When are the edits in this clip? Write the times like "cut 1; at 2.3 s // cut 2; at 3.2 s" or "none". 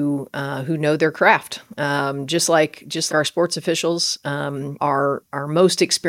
cut 1; at 3.1 s // cut 2; at 4.8 s